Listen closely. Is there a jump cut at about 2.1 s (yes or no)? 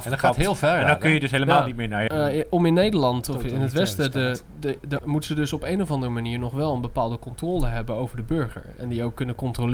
yes